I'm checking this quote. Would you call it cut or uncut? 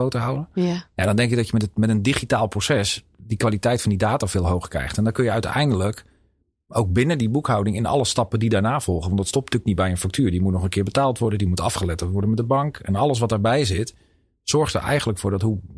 uncut